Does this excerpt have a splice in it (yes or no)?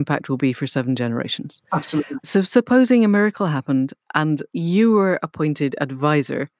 yes